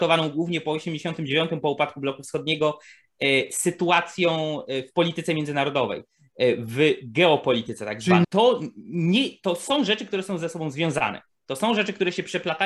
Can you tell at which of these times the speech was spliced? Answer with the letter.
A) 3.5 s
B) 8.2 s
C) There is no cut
B